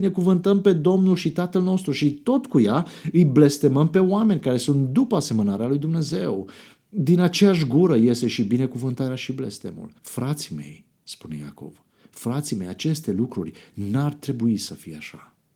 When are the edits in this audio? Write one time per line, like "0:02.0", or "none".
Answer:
0:10.0